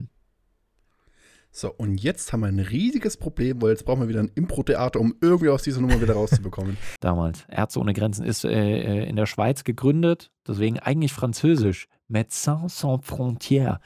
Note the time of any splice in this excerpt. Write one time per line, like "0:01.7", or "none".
0:07.0

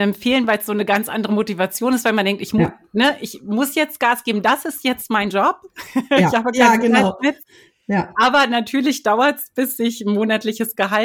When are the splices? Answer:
none

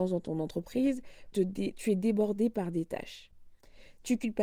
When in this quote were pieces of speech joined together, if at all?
0:01.3

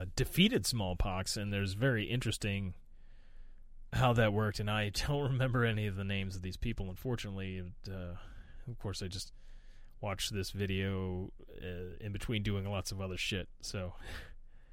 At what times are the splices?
none

